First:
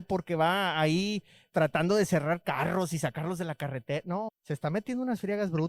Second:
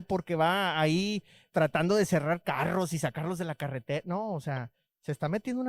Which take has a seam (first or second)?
first